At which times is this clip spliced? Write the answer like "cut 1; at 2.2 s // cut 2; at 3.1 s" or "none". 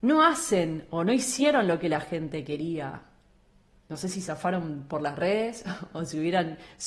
none